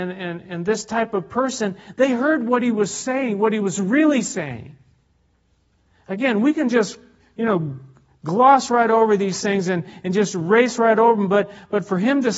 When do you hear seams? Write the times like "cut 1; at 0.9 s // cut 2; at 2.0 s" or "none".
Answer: none